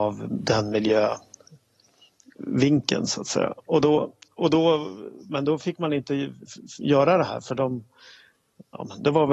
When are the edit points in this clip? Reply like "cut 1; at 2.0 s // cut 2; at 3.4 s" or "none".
none